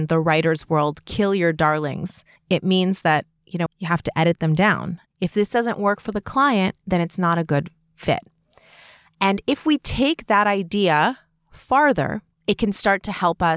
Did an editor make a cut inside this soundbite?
yes; 2 cuts; at 3.7 s, 5.1 s

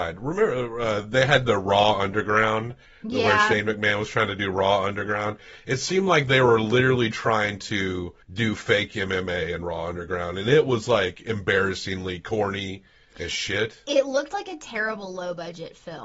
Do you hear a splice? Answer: yes; 1 cut; at 8.2 s

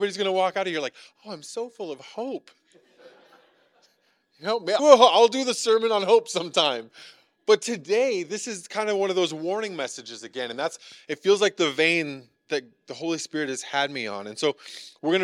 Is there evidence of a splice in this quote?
yes; 1 cut; at 4.8 s

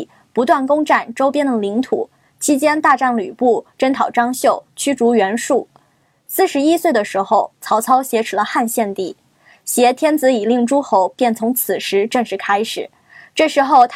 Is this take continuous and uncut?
yes; 0 cuts

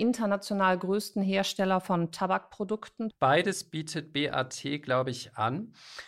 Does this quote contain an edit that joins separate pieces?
yes; 1 cut; at 3.1 s

